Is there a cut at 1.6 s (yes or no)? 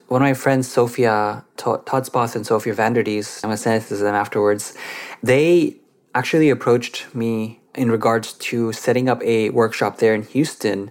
yes